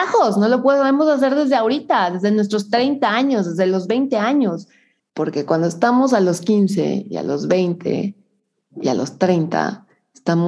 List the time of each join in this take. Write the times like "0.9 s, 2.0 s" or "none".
5.0 s